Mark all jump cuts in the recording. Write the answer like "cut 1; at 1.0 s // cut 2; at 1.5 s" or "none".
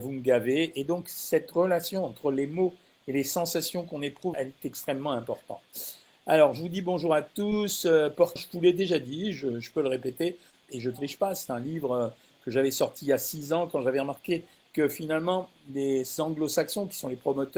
cut 1; at 4.3 s // cut 2; at 8.4 s // cut 3; at 10.6 s